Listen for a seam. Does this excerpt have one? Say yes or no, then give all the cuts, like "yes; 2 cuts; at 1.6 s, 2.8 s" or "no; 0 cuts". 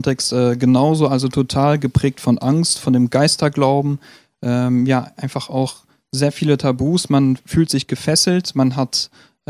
no; 0 cuts